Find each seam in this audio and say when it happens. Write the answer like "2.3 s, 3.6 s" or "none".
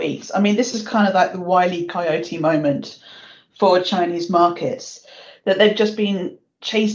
none

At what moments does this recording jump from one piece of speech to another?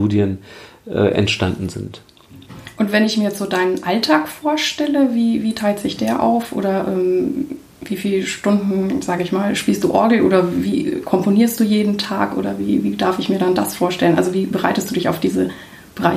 none

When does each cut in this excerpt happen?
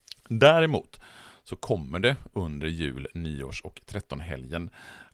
none

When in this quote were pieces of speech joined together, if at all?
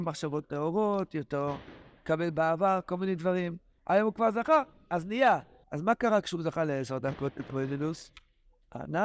3.8 s, 5.6 s

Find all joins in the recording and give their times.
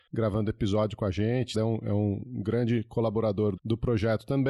1.5 s, 3.6 s

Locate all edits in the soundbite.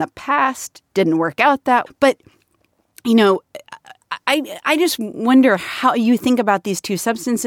1.9 s

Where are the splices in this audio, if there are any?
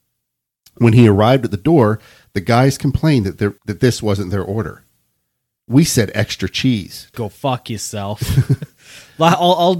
3.6 s, 7.1 s

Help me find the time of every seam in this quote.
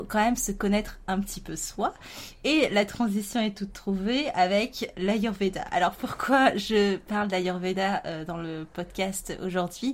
none

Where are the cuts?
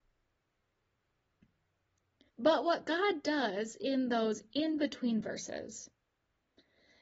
2.3 s

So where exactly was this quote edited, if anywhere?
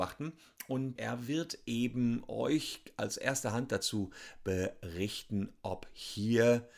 1.0 s

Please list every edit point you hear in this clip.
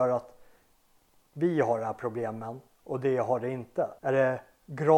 4.0 s

